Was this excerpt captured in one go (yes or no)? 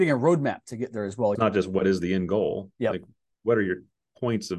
no